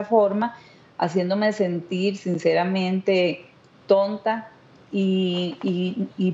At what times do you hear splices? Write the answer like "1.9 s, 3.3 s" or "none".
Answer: 4.8 s